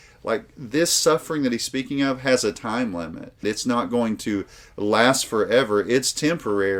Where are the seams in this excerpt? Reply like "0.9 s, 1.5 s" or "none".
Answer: 3.4 s